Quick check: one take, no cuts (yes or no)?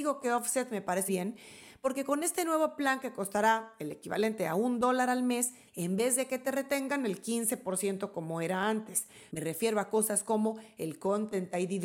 no